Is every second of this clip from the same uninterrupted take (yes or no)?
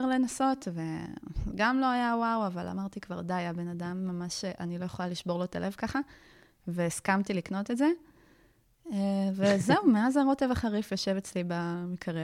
yes